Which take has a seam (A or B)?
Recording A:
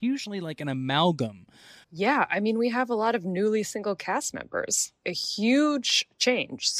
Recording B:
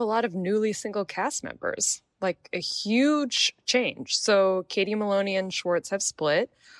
A